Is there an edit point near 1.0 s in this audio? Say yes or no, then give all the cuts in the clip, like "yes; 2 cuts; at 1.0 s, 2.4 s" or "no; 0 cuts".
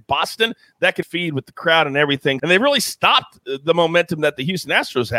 yes; 2 cuts; at 1.0 s, 2.4 s